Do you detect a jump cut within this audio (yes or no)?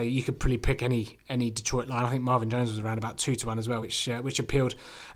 no